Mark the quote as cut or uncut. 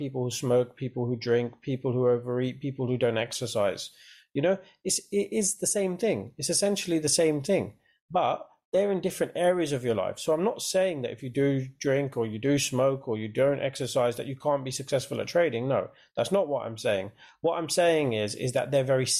uncut